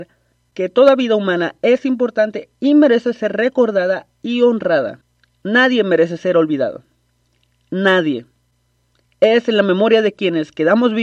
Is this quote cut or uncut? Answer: uncut